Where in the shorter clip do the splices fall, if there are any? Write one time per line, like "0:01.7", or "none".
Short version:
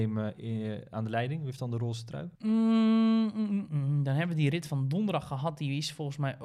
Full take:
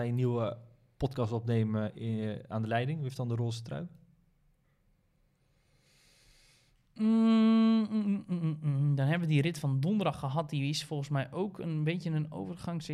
0:02.3
0:03.7